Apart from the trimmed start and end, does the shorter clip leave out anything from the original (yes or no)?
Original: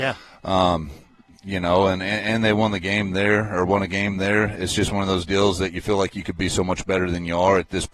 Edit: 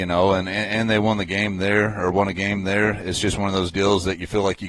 no